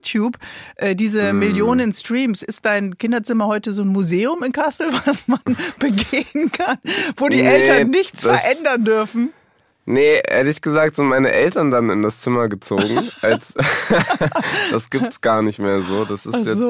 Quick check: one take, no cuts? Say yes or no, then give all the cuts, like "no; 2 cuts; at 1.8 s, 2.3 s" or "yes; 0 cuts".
yes; 0 cuts